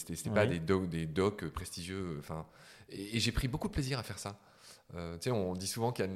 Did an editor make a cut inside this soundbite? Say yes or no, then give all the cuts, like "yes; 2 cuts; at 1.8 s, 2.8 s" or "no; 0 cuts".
no; 0 cuts